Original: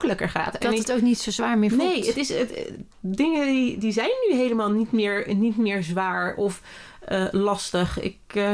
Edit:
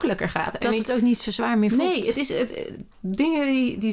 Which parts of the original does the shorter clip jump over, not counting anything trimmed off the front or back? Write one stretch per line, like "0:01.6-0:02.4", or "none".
none